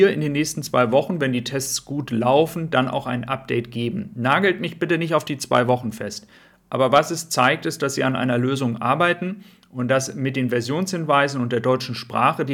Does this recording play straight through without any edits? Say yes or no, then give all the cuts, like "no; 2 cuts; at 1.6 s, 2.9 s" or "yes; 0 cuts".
yes; 0 cuts